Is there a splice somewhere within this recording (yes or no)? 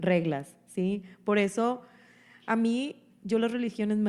no